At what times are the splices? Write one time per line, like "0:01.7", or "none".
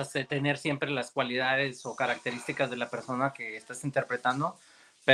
none

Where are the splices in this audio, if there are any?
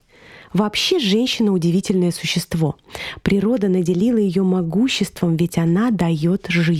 none

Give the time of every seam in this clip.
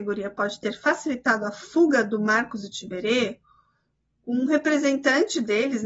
none

